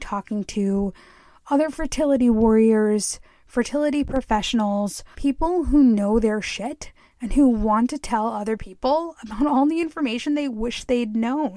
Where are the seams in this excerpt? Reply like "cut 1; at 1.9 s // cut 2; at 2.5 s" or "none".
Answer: cut 1; at 5.1 s